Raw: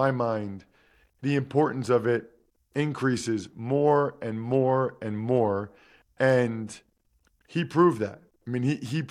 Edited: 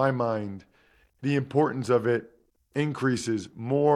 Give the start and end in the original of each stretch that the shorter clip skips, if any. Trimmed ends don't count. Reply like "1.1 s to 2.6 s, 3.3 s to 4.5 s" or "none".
none